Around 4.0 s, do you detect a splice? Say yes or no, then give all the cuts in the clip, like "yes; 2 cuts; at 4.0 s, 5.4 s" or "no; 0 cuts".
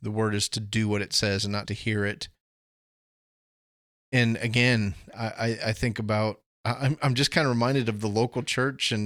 no; 1 cut; at 1.6 s